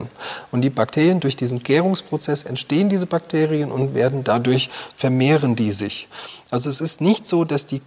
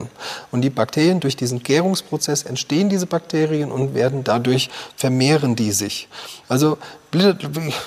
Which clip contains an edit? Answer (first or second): second